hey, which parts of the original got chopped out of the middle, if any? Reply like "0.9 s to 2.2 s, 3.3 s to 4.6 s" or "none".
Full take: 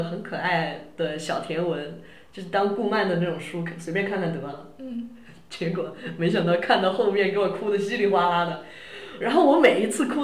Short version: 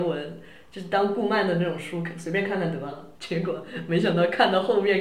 4.7 s to 5.4 s